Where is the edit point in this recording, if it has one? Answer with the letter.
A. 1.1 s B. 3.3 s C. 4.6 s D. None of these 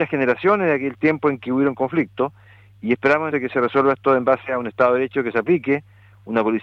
B